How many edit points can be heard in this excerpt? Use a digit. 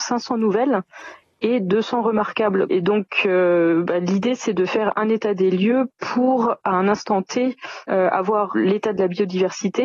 1